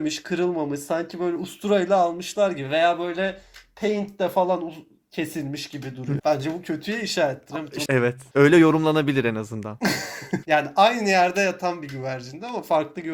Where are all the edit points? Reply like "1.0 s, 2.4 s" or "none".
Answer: 6.2 s, 7.9 s, 10.4 s

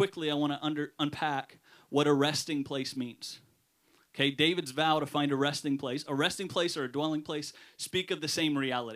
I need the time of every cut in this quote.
none

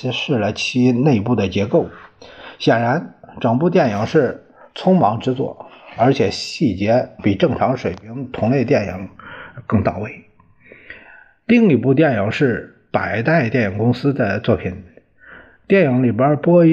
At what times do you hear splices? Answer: none

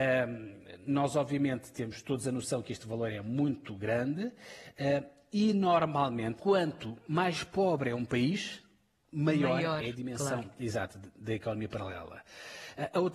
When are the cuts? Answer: 6.4 s

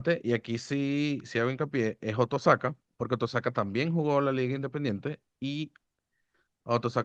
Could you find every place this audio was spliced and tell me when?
1.2 s, 2.9 s

